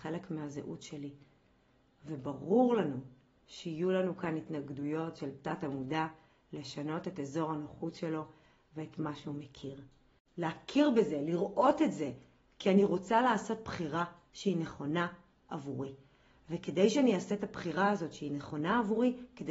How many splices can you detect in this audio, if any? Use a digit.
1